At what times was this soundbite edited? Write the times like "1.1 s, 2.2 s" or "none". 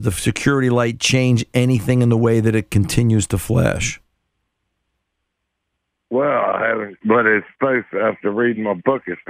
none